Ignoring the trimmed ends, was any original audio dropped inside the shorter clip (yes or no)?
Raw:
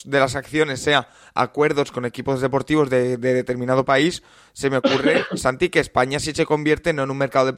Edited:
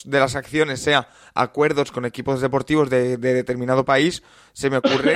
no